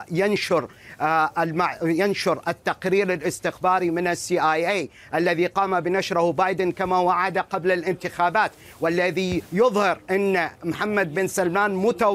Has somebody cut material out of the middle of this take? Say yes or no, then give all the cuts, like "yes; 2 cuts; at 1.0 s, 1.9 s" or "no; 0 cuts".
yes; 1 cut; at 10.0 s